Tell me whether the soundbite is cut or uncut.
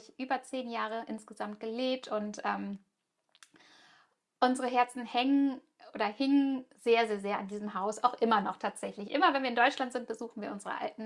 uncut